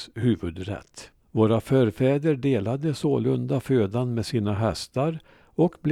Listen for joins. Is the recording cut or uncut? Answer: cut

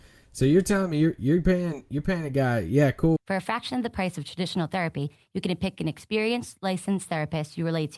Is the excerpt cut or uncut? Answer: cut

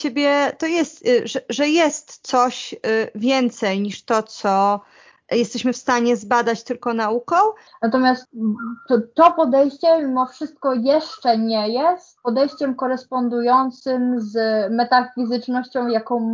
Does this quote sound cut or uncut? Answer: cut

